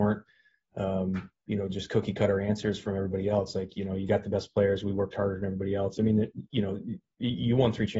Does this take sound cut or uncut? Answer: uncut